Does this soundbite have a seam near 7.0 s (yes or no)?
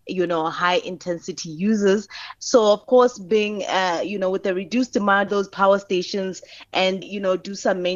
yes